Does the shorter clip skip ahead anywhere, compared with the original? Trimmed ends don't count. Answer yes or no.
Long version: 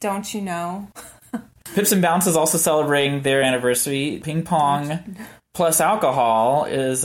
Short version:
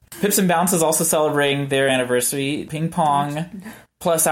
no